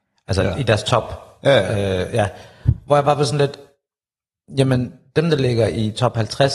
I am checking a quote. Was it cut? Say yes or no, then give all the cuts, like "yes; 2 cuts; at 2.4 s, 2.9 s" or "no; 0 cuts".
no; 0 cuts